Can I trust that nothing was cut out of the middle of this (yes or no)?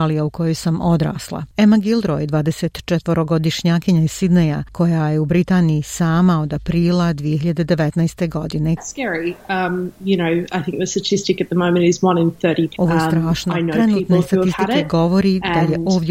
no